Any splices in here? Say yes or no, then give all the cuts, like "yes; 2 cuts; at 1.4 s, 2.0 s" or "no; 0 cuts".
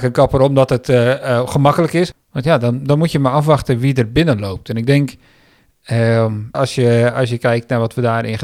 yes; 2 cuts; at 2.1 s, 6.5 s